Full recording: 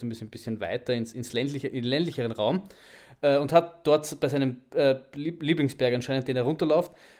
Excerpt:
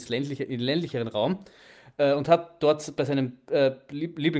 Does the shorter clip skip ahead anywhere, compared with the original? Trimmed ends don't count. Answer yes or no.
no